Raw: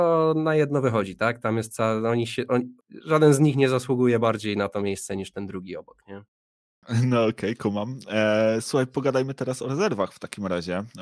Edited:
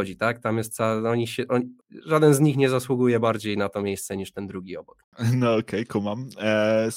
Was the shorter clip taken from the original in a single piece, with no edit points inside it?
no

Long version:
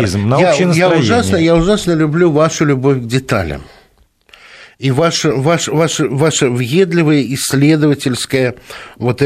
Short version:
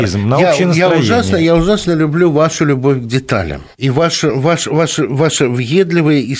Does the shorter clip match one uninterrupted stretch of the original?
no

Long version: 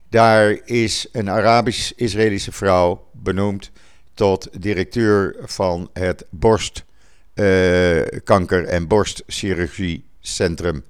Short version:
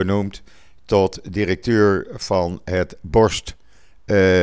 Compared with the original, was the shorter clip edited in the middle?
no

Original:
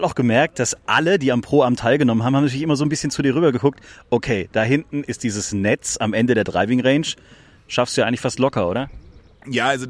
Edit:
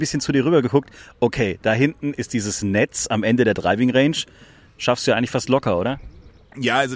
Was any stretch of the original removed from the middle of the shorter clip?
no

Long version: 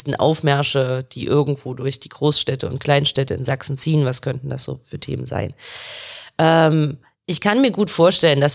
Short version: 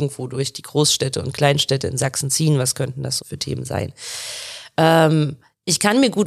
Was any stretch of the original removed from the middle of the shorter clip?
yes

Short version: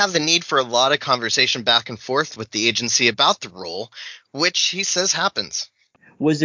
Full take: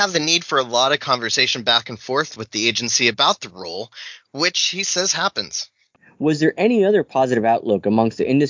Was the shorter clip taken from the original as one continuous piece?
yes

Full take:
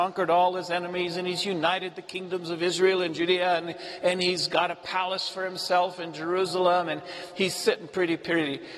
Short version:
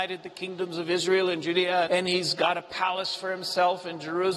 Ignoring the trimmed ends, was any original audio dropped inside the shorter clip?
yes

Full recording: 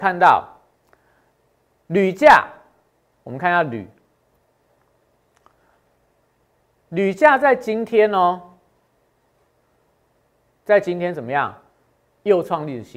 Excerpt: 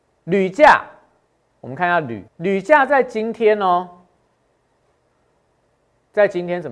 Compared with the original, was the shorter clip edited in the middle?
yes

